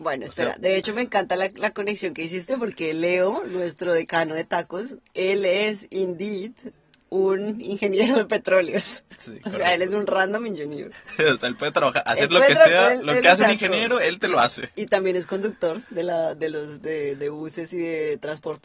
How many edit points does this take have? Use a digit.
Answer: 0